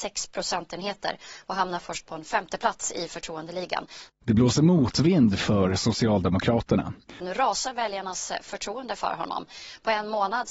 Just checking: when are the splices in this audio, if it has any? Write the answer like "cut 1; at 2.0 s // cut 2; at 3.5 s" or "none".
cut 1; at 4.1 s // cut 2; at 7.2 s